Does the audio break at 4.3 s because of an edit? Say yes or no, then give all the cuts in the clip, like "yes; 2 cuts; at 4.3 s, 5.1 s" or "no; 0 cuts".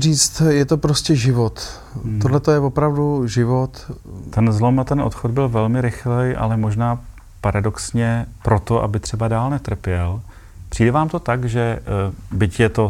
yes; 1 cut; at 4.3 s